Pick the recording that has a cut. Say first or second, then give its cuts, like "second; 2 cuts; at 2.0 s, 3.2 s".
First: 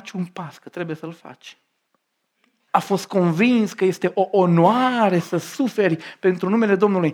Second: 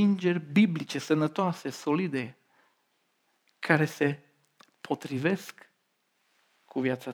first; 1 cut; at 2.7 s